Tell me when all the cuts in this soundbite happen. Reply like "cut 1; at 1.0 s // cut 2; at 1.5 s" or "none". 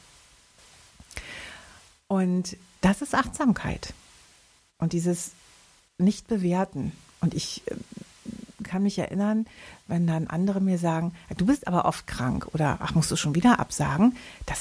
none

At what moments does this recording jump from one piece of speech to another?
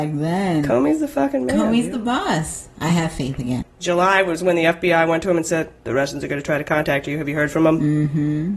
cut 1; at 3.6 s

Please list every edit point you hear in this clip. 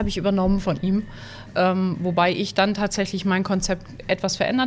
none

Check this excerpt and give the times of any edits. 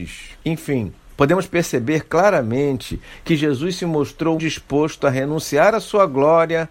cut 1; at 4.4 s

